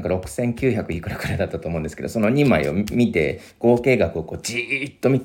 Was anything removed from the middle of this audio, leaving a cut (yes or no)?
no